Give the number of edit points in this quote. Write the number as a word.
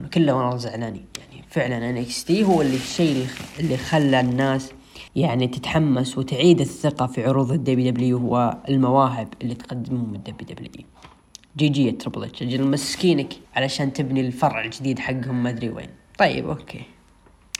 two